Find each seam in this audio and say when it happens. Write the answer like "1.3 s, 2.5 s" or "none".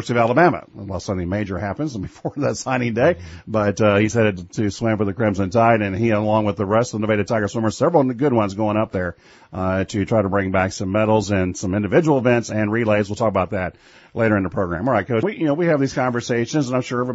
15.2 s